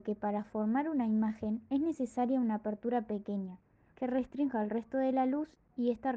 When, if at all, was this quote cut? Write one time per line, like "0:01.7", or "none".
0:03.9